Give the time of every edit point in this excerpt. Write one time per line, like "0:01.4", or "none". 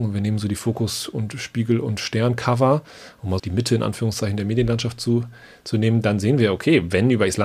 0:03.4